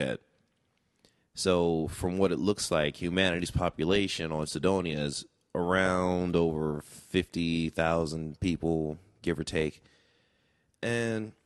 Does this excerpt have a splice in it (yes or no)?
no